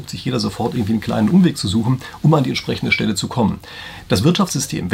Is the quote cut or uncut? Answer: uncut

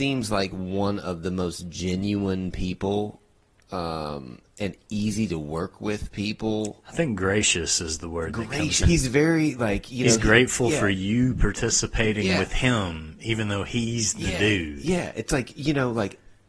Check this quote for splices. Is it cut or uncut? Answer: cut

